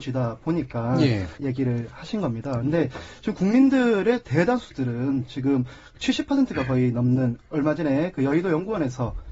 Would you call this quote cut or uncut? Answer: cut